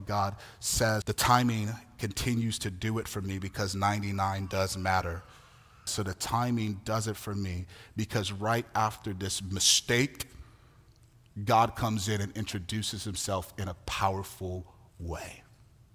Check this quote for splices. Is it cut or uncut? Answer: cut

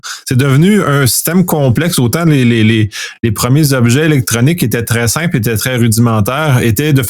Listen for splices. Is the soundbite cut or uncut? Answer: uncut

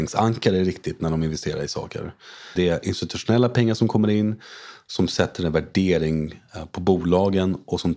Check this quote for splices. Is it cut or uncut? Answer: cut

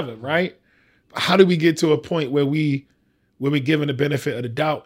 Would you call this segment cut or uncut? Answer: uncut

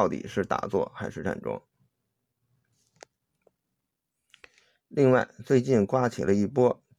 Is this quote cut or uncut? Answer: uncut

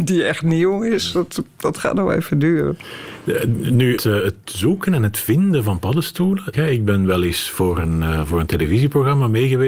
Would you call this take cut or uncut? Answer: cut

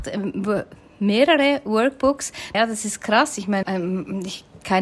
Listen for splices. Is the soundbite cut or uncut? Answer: cut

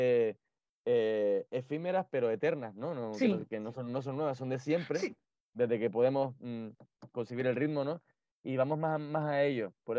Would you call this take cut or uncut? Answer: uncut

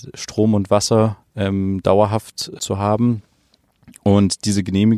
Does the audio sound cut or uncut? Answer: cut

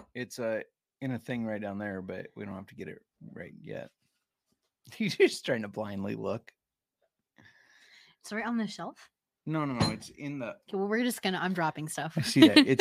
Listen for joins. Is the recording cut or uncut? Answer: uncut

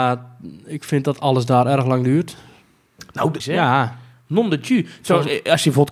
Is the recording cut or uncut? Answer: cut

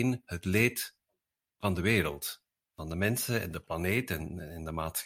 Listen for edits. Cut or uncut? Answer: uncut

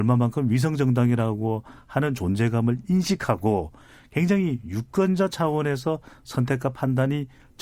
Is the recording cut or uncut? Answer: uncut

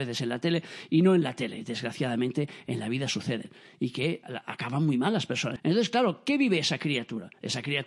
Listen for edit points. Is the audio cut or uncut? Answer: cut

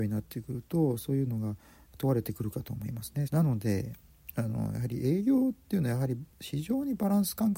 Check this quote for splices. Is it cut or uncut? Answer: cut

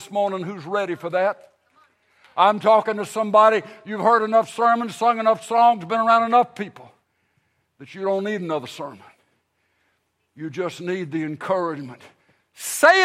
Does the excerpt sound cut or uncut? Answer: uncut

